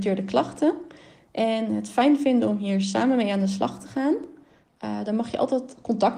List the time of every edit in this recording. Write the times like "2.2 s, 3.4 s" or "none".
none